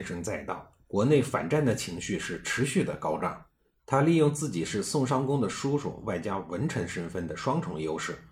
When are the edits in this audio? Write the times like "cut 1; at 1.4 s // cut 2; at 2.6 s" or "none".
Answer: cut 1; at 3.7 s